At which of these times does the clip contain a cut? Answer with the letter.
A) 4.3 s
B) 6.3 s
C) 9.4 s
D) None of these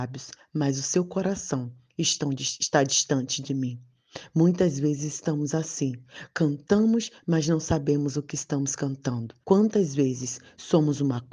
C